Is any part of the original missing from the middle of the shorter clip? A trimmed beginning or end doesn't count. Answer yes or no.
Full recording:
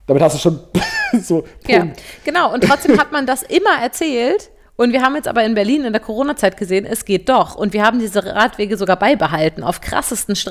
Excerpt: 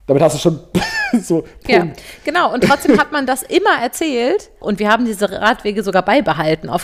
yes